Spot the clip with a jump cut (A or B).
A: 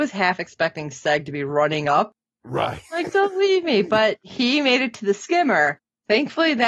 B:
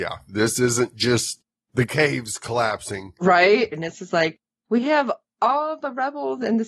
B